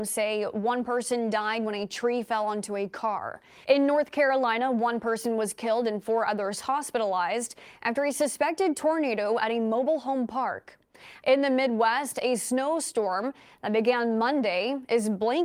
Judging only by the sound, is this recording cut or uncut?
cut